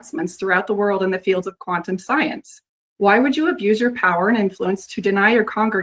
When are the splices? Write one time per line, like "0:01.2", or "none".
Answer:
none